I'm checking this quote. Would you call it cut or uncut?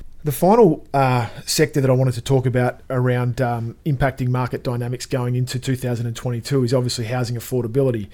uncut